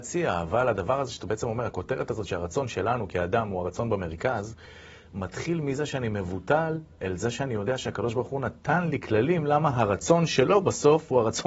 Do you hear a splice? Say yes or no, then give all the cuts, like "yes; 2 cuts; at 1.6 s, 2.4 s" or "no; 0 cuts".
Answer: no; 0 cuts